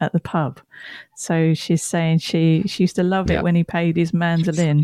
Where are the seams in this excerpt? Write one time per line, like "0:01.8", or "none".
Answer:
none

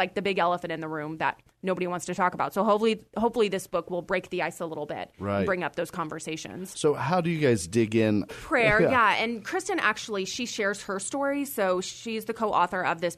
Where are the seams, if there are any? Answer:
0:08.3

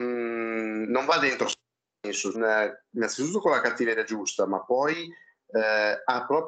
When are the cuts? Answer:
0:02.3

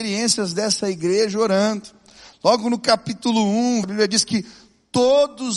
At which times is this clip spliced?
0:03.8

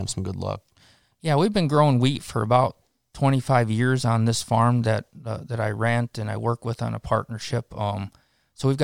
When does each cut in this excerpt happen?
none

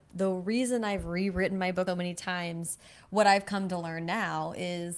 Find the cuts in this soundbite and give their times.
0:01.9

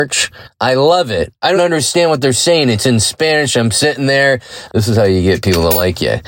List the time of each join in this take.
0:01.6
0:04.7

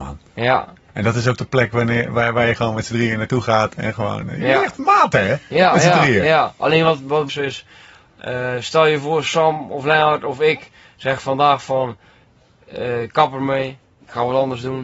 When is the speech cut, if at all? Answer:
0:07.3

